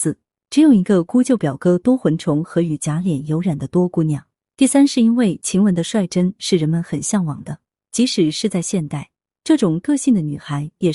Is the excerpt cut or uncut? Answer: cut